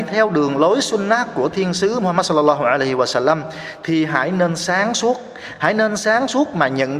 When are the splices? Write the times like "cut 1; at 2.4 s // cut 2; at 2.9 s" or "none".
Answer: none